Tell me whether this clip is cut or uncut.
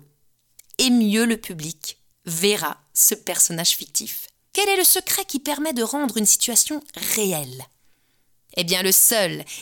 cut